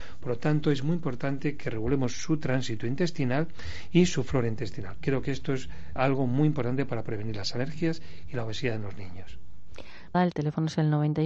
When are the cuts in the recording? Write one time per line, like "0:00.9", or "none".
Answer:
0:06.0
0:10.1

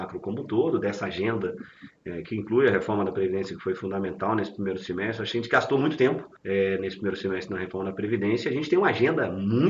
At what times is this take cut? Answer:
0:06.4

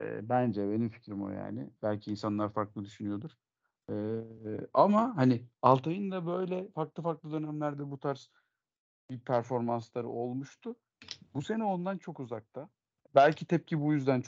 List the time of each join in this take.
0:13.1

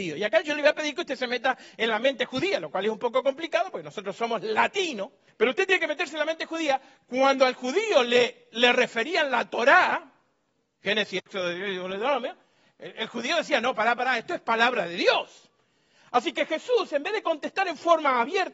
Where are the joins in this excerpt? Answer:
0:05.3

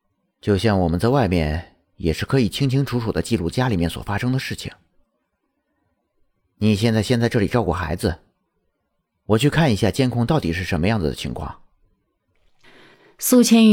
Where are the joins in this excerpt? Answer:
none

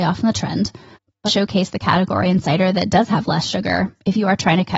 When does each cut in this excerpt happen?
0:01.3

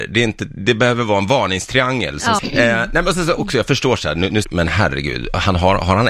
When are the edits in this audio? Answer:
0:02.4
0:04.4

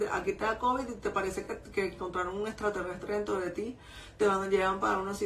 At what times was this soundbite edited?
none

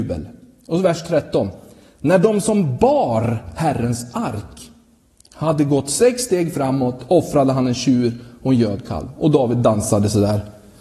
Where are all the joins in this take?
none

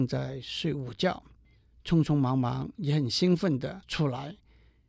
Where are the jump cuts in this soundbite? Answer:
none

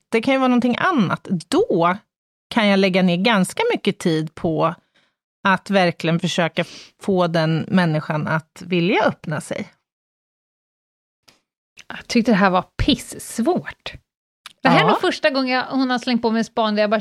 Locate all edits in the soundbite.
none

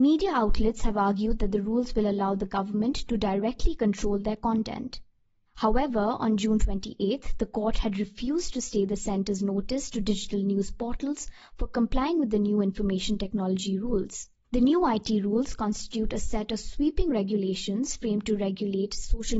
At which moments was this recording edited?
0:14.4

